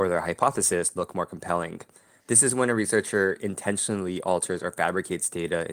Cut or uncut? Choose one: cut